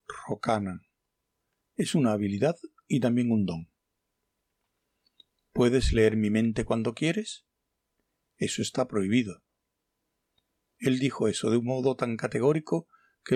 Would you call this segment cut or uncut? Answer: uncut